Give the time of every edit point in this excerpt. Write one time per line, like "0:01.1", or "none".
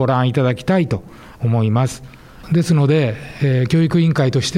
0:02.4